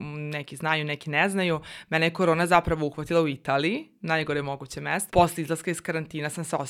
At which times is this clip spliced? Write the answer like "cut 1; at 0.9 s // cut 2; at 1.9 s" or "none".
cut 1; at 5.1 s